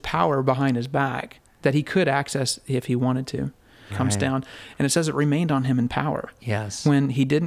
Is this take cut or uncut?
cut